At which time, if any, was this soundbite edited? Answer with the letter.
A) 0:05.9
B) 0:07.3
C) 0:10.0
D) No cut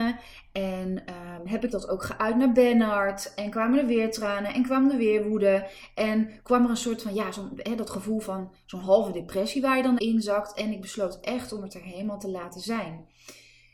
C